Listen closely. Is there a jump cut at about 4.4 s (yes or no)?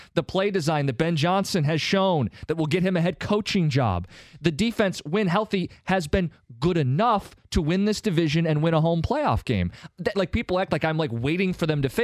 no